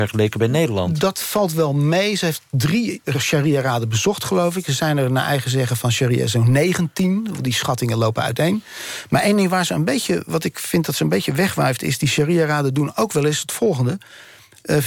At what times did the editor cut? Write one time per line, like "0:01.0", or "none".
none